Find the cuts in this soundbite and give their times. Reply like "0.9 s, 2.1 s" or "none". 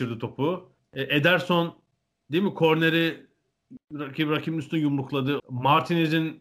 5.4 s

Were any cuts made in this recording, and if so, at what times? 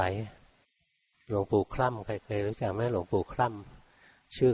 none

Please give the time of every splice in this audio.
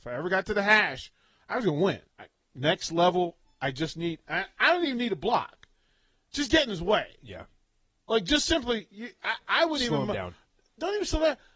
2.1 s

